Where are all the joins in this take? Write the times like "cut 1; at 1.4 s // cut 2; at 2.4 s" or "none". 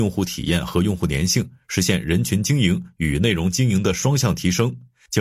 none